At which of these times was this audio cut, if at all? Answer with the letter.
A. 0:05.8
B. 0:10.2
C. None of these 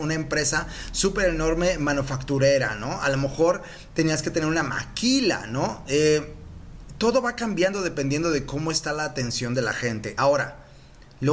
C